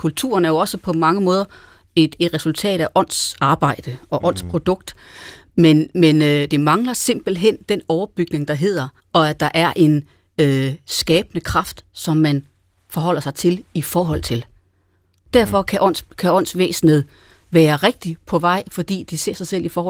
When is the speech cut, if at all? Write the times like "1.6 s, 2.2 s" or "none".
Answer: 9.0 s